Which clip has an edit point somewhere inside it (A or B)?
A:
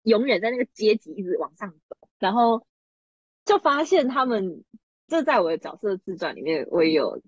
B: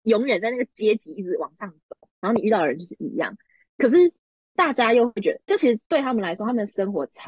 A